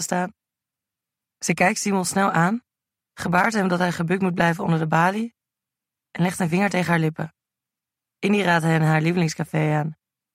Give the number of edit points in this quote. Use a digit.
2